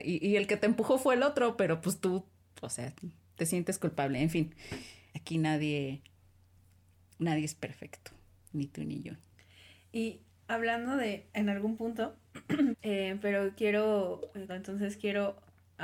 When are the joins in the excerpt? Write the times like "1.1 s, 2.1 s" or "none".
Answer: 5.1 s, 12.7 s, 14.5 s